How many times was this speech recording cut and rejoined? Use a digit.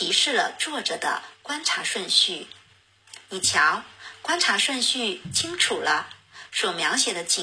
0